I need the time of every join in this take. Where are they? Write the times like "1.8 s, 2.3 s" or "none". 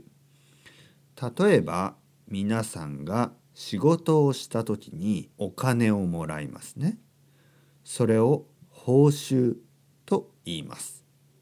5.3 s